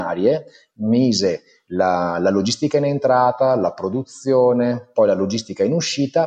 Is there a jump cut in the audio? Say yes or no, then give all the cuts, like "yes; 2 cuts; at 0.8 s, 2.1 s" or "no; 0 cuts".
no; 0 cuts